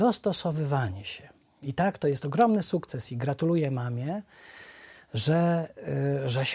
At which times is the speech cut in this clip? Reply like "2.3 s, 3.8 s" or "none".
none